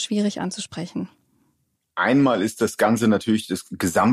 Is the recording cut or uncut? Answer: uncut